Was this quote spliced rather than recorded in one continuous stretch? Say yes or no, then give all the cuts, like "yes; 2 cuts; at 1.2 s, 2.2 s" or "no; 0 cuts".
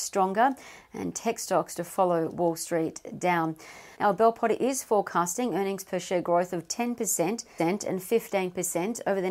yes; 2 cuts; at 3.9 s, 7.6 s